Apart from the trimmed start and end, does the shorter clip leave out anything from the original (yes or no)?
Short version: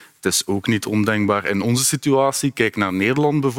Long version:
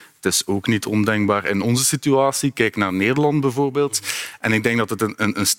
no